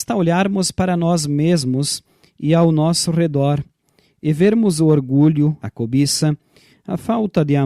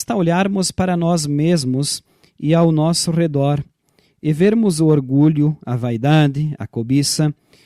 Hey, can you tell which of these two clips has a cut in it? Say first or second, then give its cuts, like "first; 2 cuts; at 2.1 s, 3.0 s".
first; 1 cut; at 5.6 s